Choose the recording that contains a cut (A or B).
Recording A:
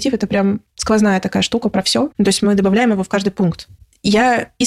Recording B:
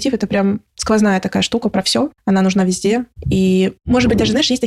A